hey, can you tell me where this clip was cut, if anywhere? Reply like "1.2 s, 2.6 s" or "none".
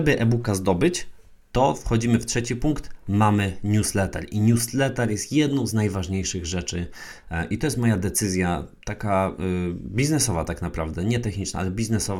none

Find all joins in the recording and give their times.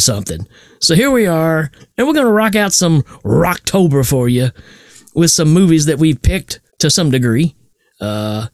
1.8 s, 6.7 s

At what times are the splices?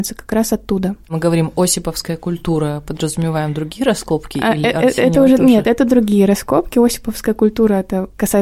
none

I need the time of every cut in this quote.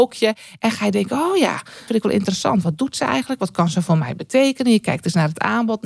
1.9 s

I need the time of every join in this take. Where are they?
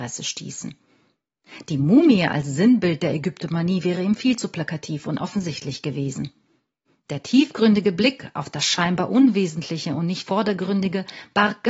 none

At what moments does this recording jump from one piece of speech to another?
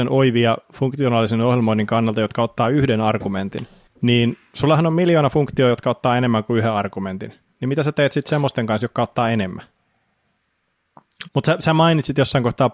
3.9 s, 11.3 s

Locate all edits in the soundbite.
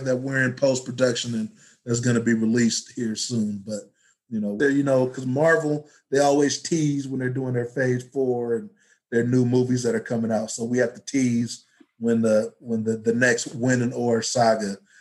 4.6 s

